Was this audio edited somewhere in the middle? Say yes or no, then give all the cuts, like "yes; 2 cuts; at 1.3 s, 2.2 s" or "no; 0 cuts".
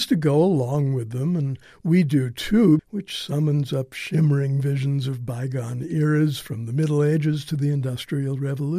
yes; 1 cut; at 2.8 s